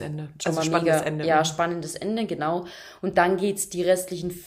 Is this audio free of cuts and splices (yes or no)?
yes